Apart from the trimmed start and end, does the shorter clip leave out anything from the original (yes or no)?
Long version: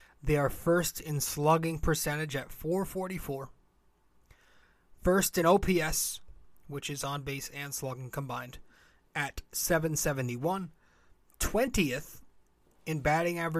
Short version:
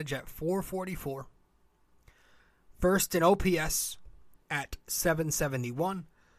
yes